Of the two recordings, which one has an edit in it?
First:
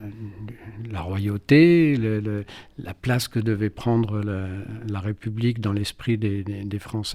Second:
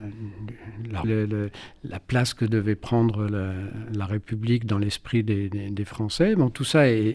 second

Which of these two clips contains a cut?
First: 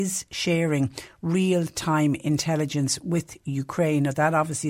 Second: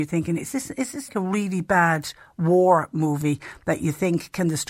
second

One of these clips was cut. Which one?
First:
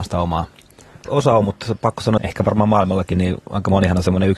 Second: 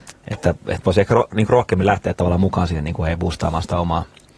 first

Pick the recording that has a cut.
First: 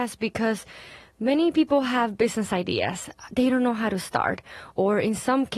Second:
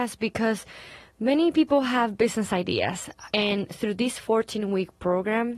second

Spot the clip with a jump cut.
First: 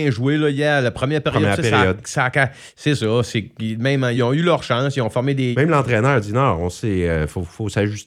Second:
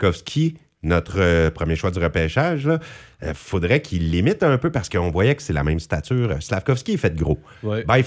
first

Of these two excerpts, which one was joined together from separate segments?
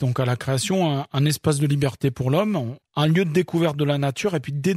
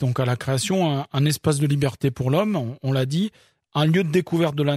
first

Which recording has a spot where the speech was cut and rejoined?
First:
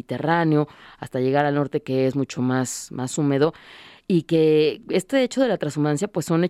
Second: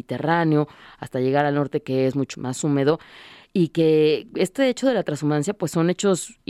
second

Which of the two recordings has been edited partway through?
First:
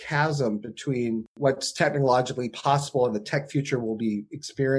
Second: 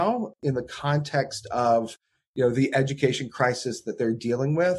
first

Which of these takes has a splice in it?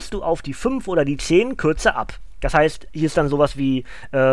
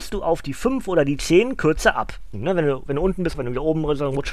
second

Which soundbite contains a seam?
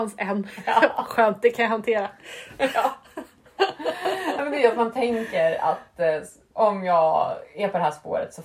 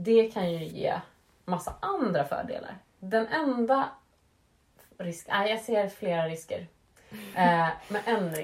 second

